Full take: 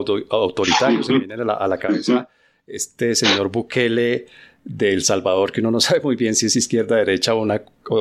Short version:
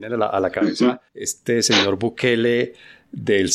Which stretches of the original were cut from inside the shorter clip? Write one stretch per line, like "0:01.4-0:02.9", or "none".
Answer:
0:02.4-0:02.6